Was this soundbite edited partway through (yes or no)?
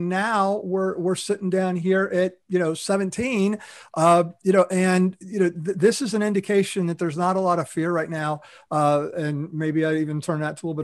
no